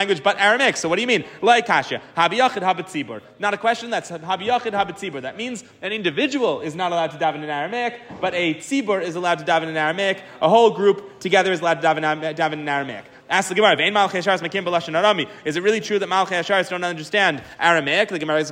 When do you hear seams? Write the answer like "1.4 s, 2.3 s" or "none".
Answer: none